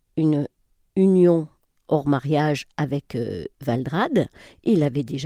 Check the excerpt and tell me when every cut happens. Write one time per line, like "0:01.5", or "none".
0:01.7